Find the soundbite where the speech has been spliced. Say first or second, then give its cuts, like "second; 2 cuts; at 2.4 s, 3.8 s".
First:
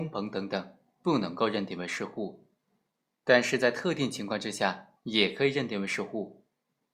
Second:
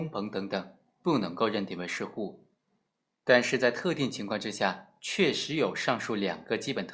first; 1 cut; at 5.0 s